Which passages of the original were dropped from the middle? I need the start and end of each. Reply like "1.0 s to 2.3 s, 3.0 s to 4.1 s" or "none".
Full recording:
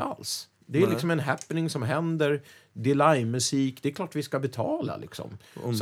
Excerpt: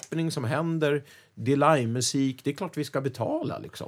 none